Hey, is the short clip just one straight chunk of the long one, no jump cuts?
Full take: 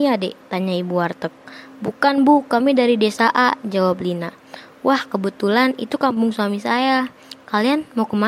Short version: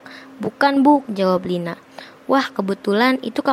no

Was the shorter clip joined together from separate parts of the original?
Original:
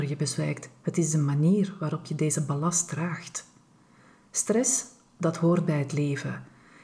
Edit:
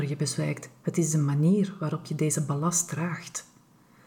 no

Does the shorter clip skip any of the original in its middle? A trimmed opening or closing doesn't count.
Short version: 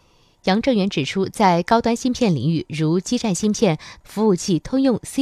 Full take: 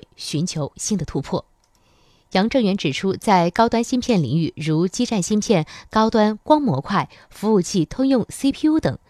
yes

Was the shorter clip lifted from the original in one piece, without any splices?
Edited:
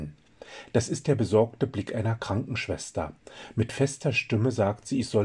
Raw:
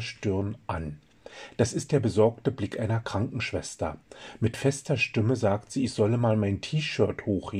yes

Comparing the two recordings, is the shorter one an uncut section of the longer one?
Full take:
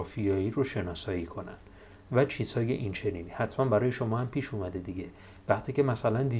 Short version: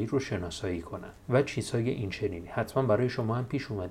no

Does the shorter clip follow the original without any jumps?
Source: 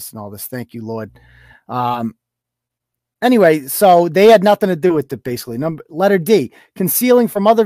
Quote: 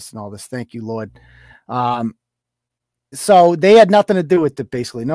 no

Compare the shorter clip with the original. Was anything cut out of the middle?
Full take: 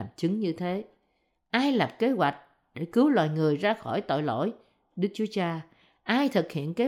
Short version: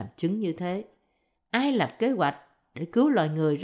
no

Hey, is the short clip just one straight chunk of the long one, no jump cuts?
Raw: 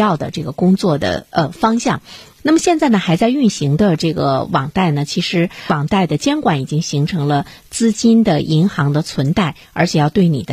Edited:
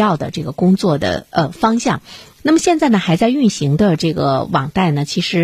yes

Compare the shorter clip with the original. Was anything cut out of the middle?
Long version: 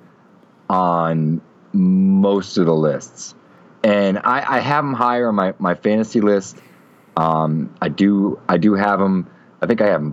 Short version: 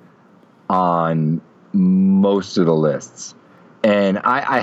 no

